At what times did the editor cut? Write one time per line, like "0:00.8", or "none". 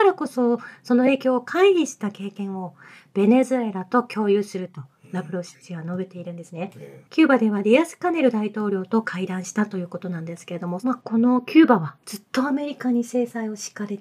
0:07.1